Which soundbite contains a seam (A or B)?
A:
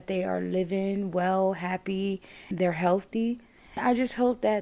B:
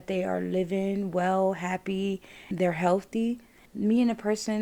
B